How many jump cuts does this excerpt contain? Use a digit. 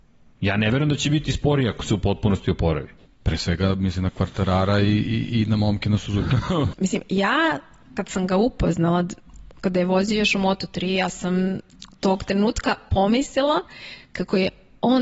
2